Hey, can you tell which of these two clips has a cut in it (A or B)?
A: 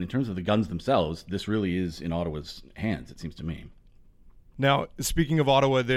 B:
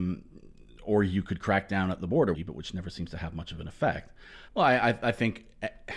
B